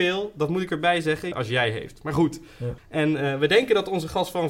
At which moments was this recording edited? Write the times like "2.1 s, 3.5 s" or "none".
1.3 s, 2.8 s